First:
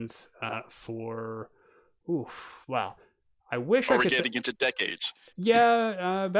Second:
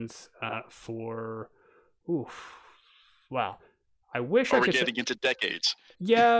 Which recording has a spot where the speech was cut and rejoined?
first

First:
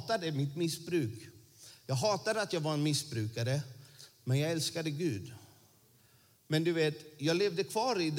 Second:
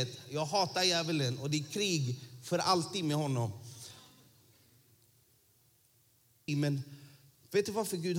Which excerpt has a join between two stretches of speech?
second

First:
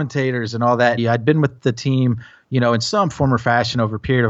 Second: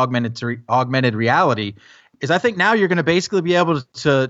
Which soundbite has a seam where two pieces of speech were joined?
first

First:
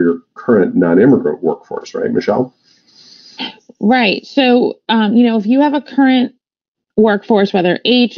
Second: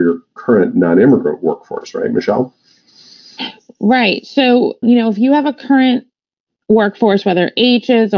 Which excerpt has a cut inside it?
second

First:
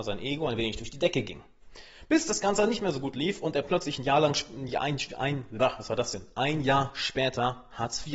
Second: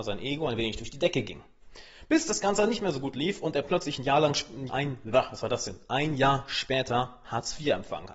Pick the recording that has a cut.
second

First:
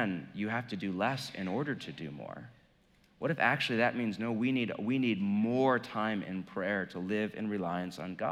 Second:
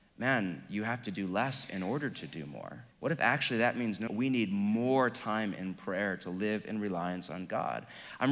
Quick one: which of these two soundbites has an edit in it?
second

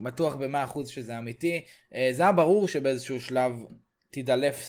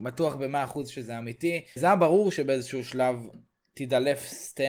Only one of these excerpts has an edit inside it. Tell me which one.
second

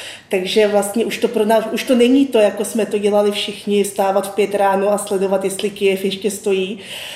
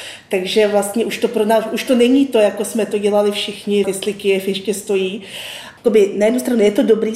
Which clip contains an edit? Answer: second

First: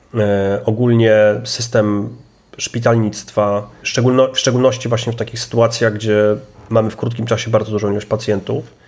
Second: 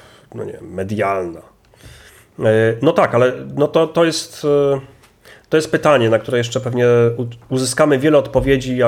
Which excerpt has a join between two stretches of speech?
first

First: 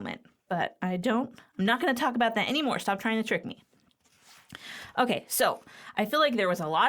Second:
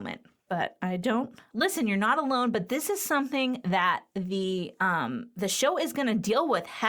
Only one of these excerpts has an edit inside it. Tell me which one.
second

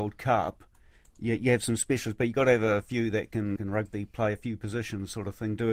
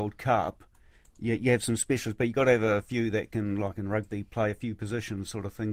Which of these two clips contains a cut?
first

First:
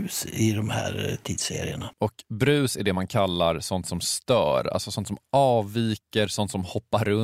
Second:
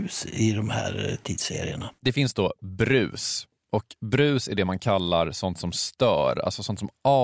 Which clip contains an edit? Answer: first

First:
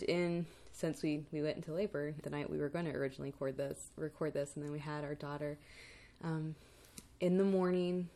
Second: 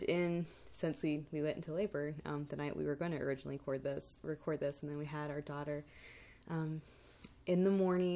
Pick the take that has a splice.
first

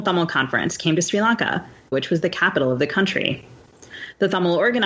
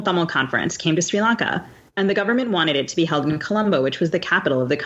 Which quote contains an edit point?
first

